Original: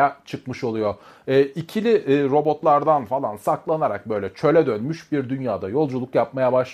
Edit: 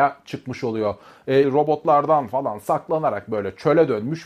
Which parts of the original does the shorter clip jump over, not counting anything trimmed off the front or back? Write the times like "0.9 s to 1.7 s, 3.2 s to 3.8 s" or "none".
1.4 s to 2.2 s